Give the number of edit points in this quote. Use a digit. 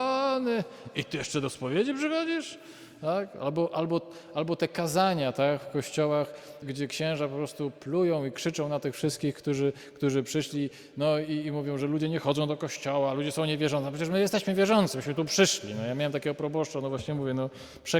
1